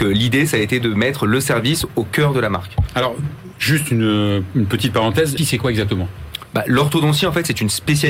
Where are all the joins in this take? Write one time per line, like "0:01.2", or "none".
0:05.4